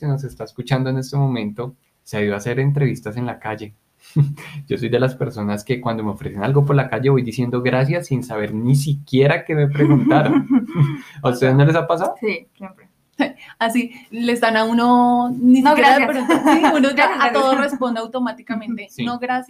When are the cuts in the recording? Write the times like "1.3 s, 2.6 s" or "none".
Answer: none